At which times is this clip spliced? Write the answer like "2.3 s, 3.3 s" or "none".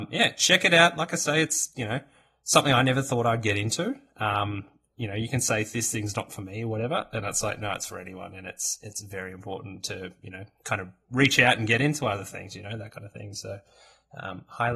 none